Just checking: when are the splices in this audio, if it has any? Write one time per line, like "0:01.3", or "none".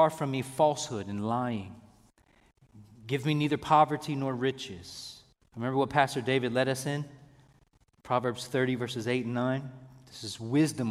0:05.4